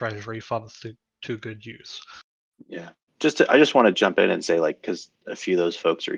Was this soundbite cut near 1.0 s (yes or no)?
no